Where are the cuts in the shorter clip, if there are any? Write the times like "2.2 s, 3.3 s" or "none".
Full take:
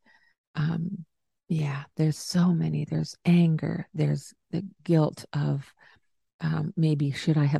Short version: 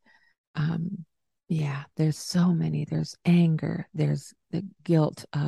none